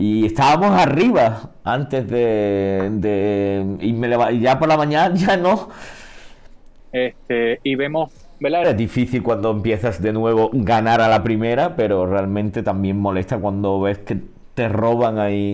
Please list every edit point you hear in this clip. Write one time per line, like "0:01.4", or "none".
0:06.8
0:08.6